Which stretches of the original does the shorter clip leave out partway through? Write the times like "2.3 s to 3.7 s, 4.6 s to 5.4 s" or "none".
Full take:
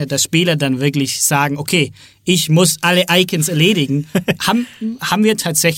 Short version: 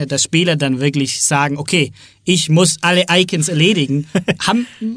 none